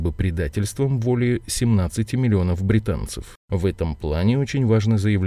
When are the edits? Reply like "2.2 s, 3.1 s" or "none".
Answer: 3.4 s